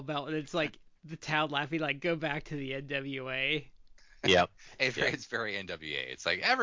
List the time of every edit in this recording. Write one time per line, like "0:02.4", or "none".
none